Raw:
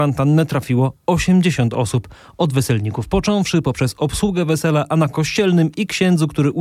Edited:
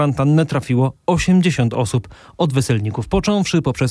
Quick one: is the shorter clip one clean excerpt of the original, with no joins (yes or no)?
yes